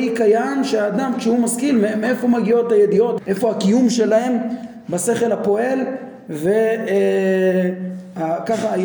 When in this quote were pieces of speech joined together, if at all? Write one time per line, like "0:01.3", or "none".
0:03.2